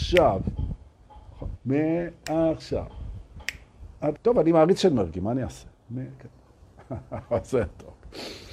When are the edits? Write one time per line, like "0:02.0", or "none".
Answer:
0:01.6
0:04.2